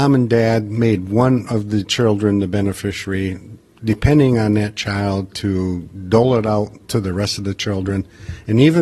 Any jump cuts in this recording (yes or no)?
yes